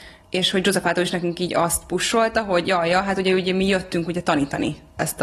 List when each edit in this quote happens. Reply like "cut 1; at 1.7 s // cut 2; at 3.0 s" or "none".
none